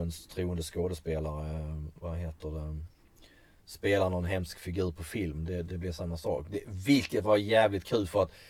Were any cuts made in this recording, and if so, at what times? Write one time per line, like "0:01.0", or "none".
none